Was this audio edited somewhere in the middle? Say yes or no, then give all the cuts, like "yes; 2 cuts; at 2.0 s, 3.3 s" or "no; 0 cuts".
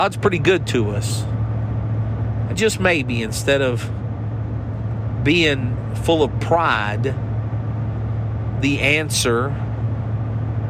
yes; 1 cut; at 2.5 s